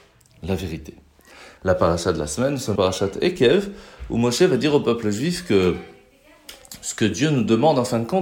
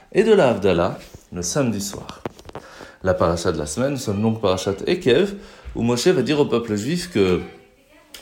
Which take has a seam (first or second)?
first